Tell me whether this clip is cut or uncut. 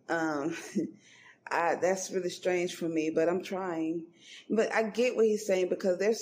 uncut